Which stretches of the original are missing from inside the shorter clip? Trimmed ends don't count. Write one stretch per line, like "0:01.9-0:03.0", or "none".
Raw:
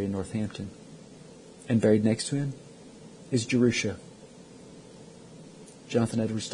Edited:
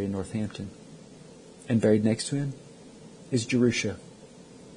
none